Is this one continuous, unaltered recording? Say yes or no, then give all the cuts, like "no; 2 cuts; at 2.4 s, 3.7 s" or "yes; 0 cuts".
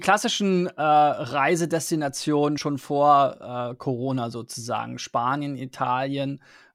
yes; 0 cuts